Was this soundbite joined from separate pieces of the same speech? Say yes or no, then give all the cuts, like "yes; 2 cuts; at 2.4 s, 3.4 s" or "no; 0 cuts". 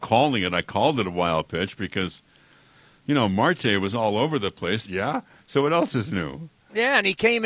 yes; 1 cut; at 4.9 s